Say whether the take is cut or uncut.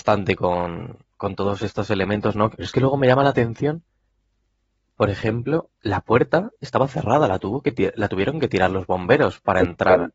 cut